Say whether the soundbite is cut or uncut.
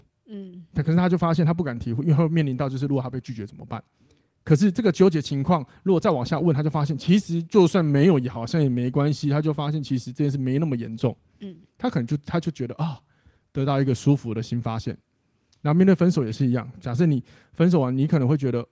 uncut